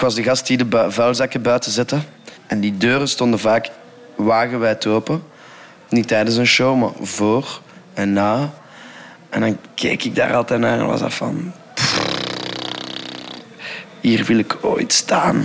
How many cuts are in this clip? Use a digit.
0